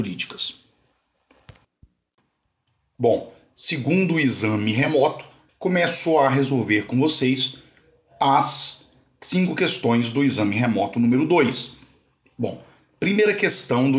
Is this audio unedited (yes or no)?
no